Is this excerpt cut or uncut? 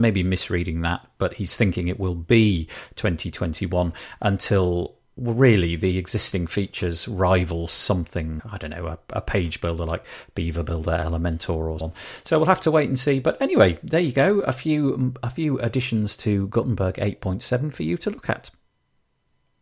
cut